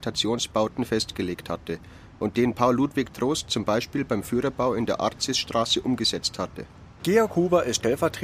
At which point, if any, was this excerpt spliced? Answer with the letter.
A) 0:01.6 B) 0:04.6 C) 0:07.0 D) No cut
C